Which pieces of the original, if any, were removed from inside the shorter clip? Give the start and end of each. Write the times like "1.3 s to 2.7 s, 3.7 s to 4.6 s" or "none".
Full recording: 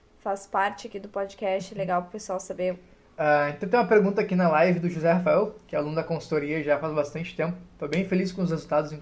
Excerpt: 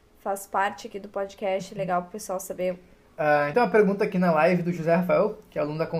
3.5 s to 3.7 s